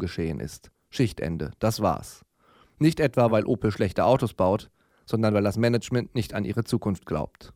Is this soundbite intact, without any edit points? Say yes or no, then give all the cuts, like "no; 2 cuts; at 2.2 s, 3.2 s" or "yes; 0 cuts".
yes; 0 cuts